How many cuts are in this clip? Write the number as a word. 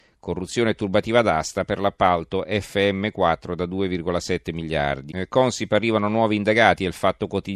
one